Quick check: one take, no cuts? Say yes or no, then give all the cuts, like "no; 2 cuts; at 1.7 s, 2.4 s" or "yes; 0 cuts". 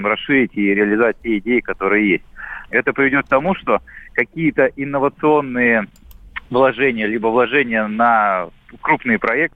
no; 1 cut; at 2.7 s